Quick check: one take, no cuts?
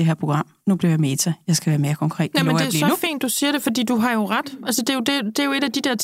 yes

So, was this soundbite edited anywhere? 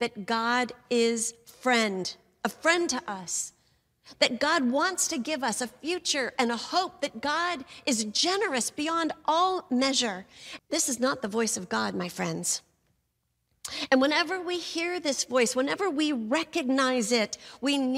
yes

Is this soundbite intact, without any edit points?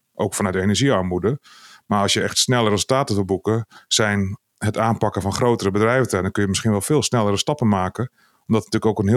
yes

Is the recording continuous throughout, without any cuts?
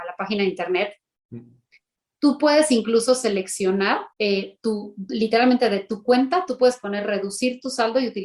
no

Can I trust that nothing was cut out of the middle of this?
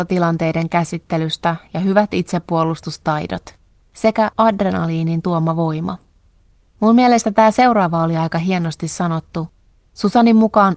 yes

